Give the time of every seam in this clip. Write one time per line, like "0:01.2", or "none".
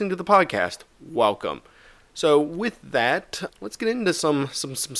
0:03.5